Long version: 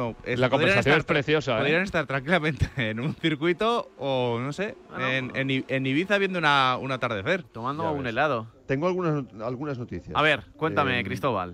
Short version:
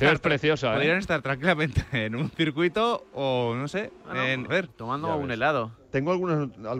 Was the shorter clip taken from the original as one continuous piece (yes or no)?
no